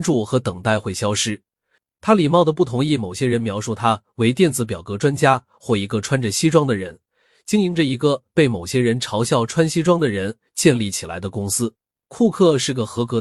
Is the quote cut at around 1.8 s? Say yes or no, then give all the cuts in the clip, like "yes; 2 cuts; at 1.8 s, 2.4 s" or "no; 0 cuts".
yes; 1 cut; at 1.8 s